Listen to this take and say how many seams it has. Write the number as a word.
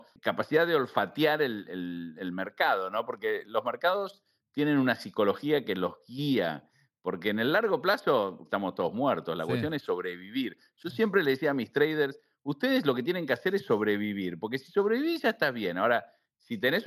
two